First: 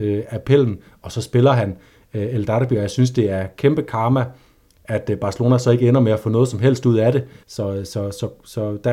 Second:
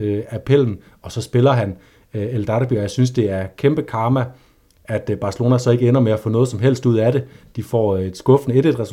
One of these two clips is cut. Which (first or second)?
first